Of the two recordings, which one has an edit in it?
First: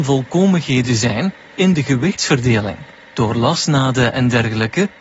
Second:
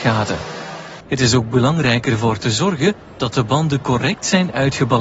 second; 1 cut; at 1.0 s

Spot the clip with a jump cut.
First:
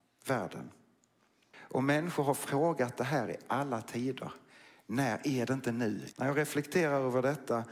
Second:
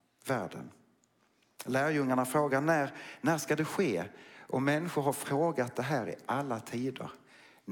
first; 2 cuts; at 1.5 s, 6.1 s

